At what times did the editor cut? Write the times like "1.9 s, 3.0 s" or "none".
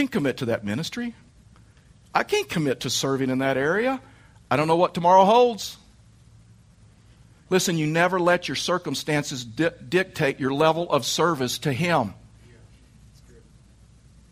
7.5 s